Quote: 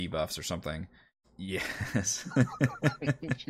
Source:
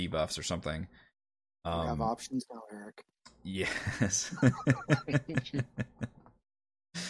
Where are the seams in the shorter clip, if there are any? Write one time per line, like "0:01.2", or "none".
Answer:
0:01.2